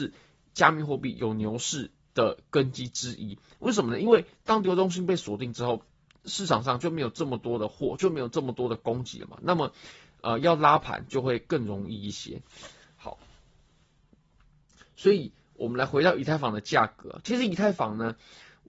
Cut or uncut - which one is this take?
uncut